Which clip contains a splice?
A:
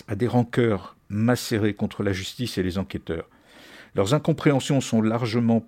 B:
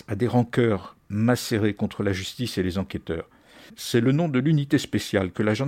B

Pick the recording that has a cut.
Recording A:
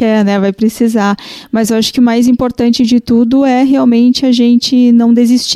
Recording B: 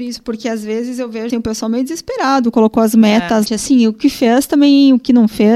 B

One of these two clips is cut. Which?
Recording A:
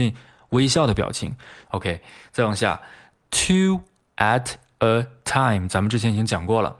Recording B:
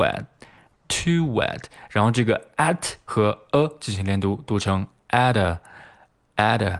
A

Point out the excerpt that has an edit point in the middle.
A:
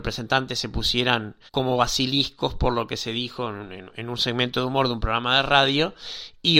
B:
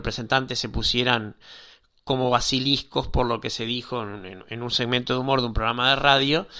A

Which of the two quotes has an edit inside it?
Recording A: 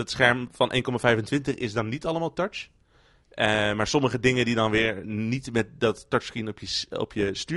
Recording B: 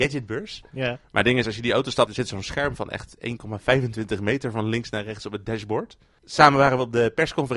B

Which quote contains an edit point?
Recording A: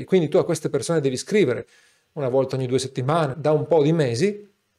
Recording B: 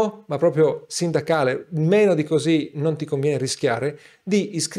A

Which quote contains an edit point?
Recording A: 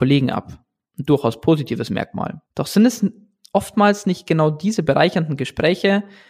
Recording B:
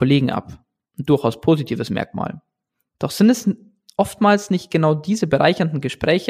A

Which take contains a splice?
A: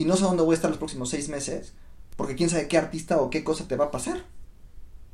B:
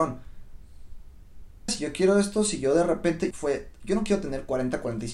B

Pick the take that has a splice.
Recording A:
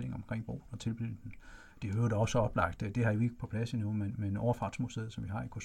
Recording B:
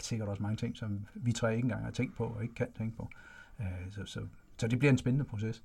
A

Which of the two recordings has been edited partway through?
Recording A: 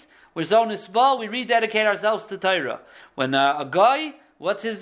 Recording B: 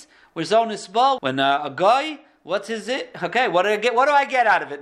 B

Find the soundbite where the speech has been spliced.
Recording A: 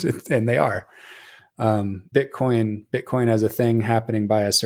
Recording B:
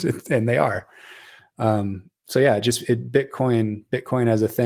A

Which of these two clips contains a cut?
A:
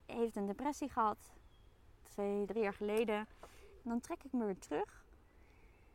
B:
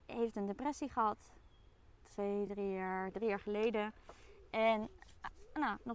A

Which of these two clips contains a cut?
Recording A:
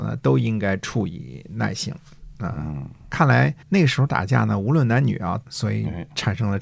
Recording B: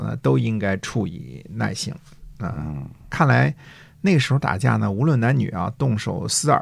A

